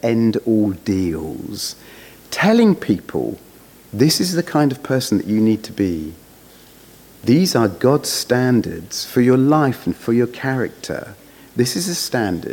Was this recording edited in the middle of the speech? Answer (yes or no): no